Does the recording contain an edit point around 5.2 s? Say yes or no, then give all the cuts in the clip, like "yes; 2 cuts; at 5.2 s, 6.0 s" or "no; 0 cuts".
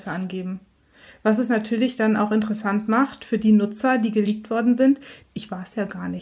yes; 1 cut; at 5.2 s